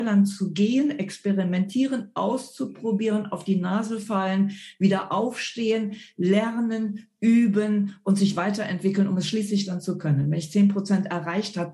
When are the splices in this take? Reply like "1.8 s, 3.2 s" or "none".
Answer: none